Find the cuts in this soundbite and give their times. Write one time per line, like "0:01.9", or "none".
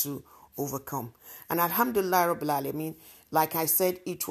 none